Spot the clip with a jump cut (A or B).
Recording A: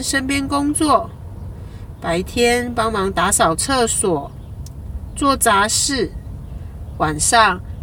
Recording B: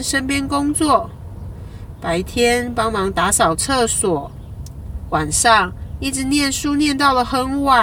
B